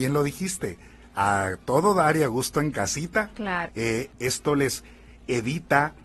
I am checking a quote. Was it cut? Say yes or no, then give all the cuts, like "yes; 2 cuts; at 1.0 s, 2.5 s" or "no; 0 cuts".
yes; 1 cut; at 3.7 s